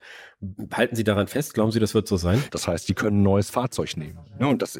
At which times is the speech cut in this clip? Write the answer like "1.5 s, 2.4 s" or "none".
2.5 s

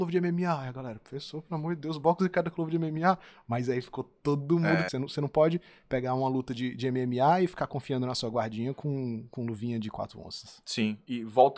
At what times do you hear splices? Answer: 4.9 s

